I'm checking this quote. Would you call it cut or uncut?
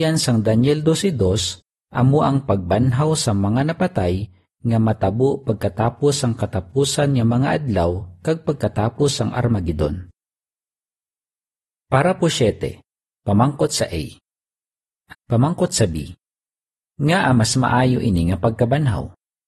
cut